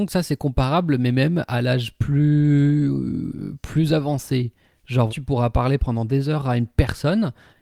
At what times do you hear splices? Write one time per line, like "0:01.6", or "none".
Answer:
0:05.1

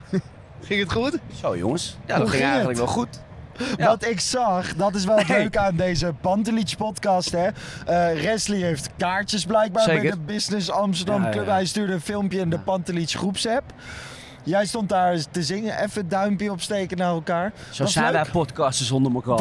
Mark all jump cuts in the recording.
none

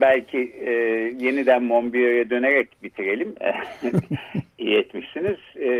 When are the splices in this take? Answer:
0:03.3

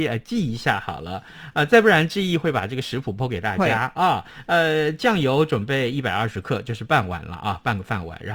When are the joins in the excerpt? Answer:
none

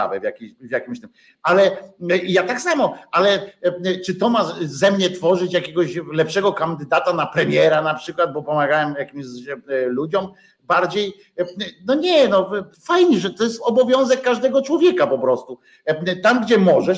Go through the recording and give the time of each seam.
0:12.7

